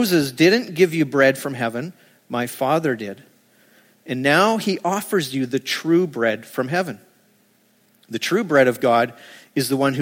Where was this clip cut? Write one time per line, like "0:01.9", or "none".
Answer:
none

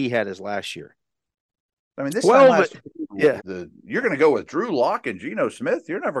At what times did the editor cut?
0:03.4

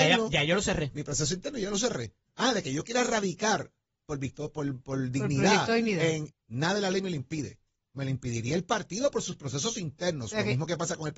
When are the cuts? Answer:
0:04.0
0:06.3

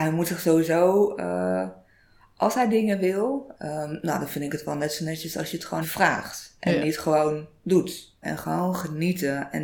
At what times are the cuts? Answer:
0:03.5
0:05.8
0:08.2

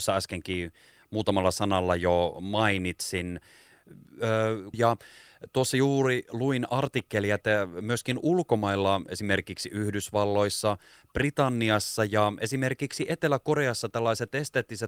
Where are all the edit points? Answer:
0:04.7

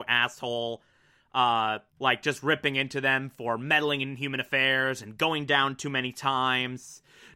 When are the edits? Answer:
0:01.9

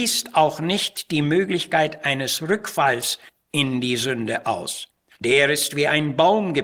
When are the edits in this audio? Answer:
0:05.1

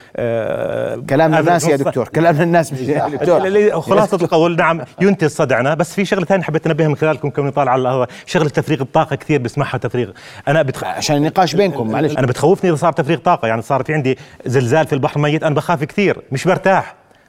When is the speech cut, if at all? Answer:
0:10.8
0:12.1

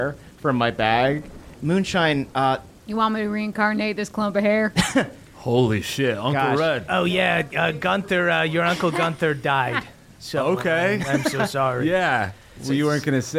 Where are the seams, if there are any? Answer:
0:01.6

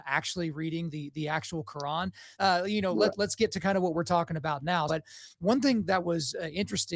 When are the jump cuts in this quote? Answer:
0:02.3
0:04.9

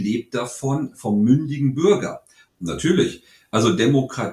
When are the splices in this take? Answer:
0:02.5

